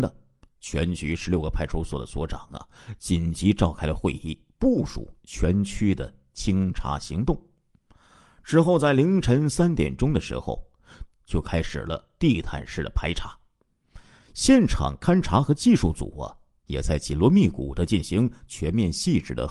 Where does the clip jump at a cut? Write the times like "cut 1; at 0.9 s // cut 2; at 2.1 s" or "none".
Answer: cut 1; at 11.1 s